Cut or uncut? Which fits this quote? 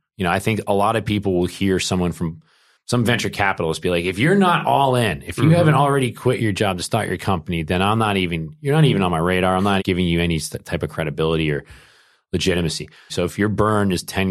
cut